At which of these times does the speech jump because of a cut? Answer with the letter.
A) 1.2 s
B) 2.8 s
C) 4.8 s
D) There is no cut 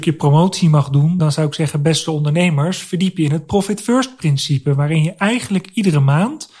D